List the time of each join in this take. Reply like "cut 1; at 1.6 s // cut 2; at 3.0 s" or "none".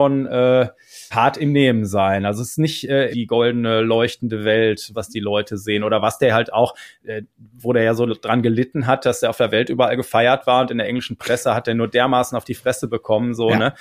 cut 1; at 1.1 s // cut 2; at 3.1 s // cut 3; at 4.9 s